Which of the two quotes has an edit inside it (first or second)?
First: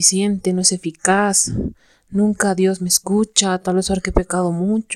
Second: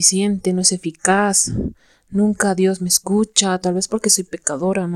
second